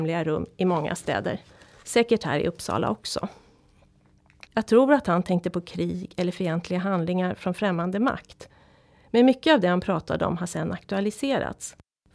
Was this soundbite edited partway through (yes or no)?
yes